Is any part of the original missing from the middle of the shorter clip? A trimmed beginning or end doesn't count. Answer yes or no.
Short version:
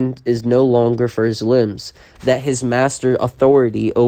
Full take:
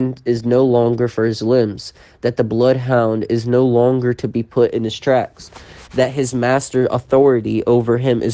yes